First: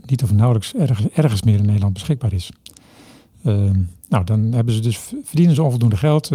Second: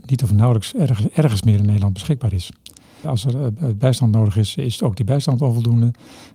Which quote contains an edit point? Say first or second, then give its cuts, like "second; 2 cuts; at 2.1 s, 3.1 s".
second; 1 cut; at 3.0 s